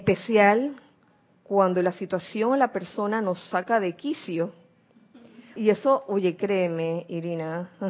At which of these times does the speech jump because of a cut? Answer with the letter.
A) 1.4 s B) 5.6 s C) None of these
B